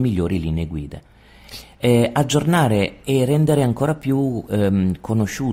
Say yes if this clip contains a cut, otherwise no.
yes